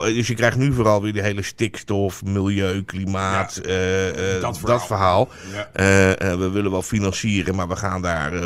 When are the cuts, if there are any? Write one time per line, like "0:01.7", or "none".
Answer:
none